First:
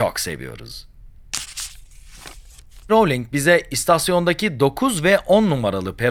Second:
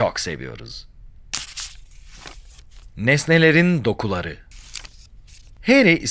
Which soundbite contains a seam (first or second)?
first